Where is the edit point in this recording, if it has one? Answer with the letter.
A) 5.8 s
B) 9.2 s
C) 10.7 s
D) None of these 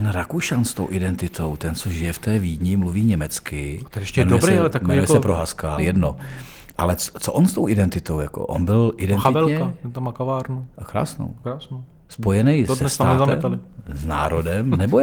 A